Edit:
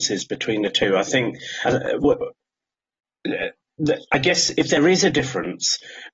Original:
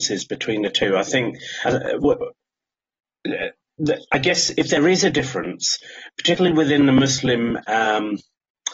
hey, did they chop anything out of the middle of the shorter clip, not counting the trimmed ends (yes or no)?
no